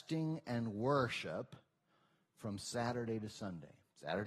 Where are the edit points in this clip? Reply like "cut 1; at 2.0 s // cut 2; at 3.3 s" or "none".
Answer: none